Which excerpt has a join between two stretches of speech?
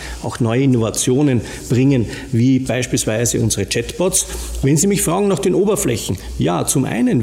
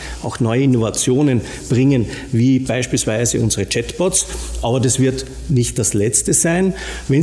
first; 1 cut; at 4.6 s

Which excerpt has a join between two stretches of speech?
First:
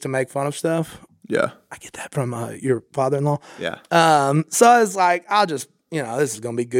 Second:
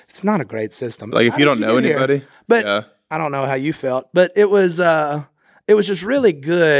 second; 1 cut; at 1.1 s

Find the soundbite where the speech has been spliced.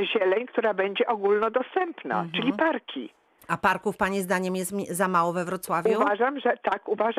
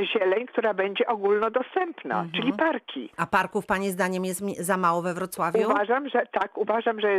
second; 1 cut; at 3.1 s

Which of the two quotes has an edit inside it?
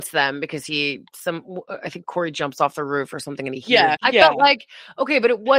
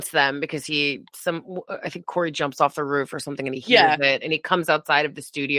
first; 1 cut; at 4.0 s

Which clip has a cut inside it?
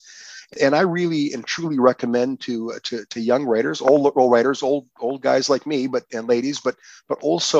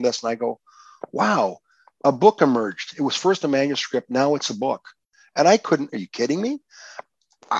second; 1 cut; at 5.9 s

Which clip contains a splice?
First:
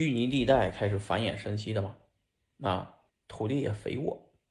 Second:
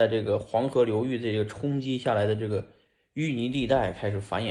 first; 1 cut; at 3.1 s

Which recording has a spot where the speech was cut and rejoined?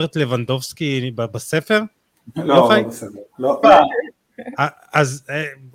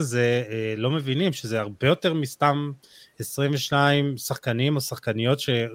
first; 1 cut; at 3.6 s

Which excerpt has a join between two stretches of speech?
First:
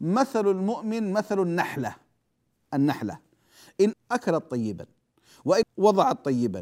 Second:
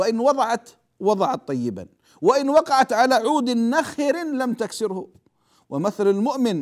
first; 2 cuts; at 3.9 s, 5.6 s

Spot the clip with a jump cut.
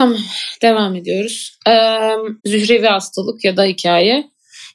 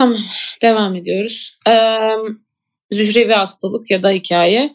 first; 1 cut; at 2.4 s

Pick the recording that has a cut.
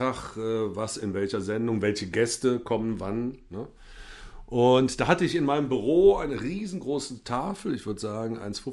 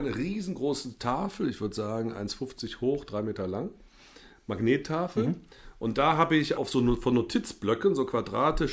second; 1 cut; at 6.6 s

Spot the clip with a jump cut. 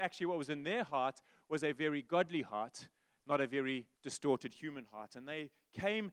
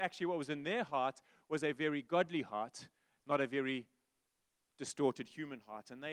first; 1 cut; at 3.9 s

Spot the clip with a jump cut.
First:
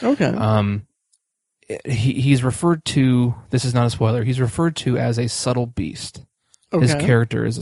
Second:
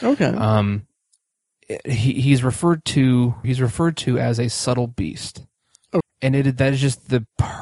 second; 2 cuts; at 3.4 s, 6.0 s

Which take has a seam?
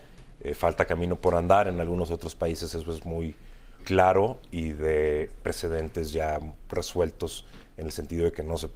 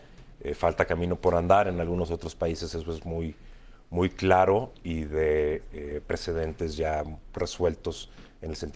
first; 2 cuts; at 3.8 s, 5.4 s

